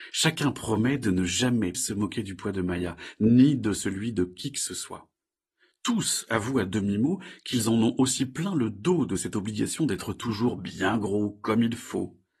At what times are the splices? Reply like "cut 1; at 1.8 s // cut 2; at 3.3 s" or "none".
cut 1; at 1.7 s